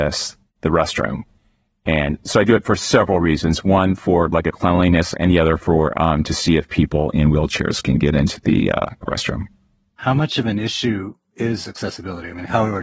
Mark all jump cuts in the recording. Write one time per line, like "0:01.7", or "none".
0:05.1